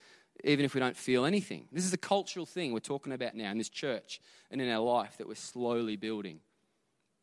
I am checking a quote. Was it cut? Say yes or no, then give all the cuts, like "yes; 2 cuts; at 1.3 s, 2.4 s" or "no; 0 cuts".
no; 0 cuts